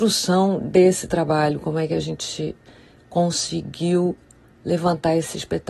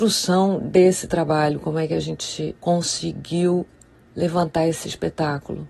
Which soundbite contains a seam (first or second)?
second